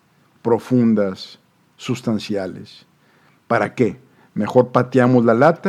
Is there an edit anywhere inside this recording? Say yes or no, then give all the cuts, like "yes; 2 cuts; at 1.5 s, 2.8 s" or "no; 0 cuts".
no; 0 cuts